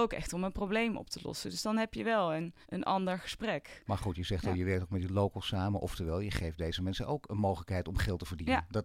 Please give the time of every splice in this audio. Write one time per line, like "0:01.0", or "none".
0:02.6